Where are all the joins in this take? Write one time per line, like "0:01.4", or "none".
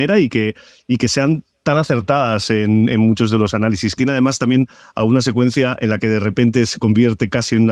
0:04.0